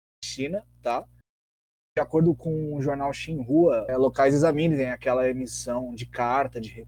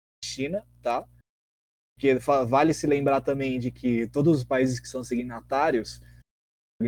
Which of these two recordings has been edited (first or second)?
first